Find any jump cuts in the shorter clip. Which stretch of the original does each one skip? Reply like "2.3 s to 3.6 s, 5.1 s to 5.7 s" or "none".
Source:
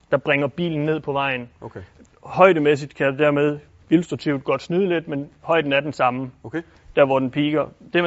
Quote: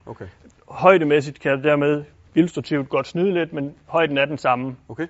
none